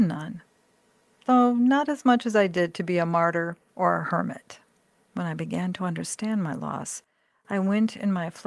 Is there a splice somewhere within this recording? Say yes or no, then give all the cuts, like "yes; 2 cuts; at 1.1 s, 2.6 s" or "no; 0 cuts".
yes; 1 cut; at 5.0 s